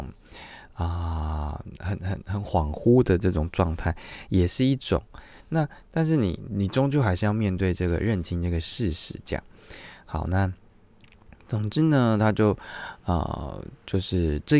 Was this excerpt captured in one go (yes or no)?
no